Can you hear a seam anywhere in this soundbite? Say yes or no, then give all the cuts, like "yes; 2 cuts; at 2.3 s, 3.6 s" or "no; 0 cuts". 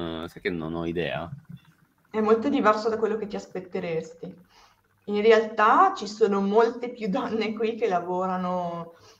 no; 0 cuts